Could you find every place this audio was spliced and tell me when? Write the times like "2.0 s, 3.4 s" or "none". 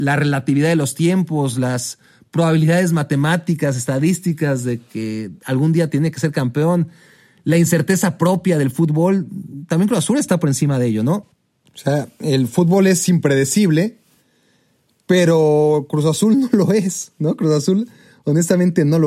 none

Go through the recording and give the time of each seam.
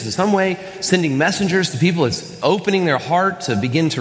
none

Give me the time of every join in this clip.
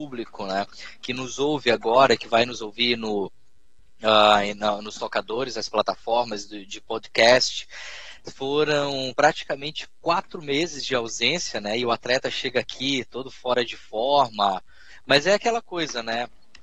none

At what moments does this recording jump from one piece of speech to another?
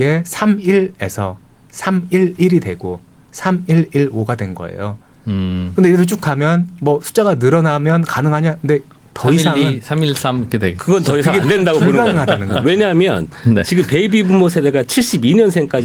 none

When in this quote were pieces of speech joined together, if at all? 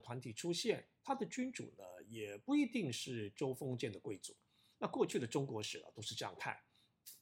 4.7 s

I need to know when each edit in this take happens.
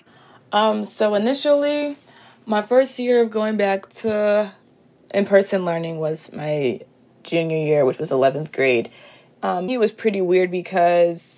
9.7 s

